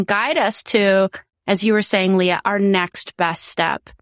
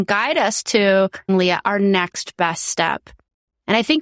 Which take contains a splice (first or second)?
second